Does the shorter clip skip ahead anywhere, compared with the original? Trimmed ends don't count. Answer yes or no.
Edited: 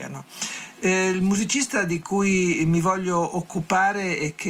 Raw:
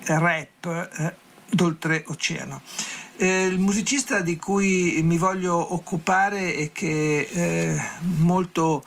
no